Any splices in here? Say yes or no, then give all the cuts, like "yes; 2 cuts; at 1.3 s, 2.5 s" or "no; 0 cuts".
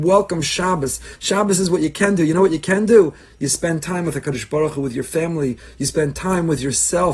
yes; 1 cut; at 1.2 s